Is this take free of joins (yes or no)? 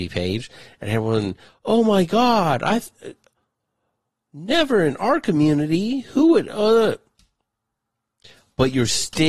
yes